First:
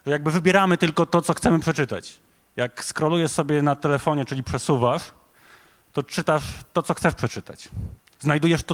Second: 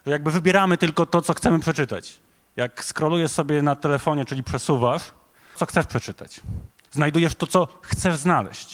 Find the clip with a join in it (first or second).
second